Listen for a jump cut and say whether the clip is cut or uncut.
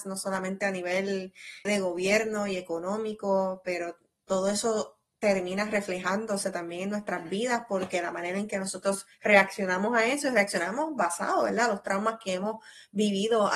cut